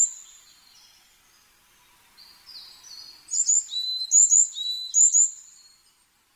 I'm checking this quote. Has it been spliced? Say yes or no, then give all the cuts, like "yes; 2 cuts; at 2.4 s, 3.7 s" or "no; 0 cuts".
no; 0 cuts